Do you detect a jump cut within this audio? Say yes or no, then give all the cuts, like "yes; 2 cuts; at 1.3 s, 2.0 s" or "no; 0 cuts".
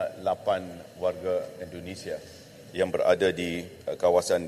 no; 0 cuts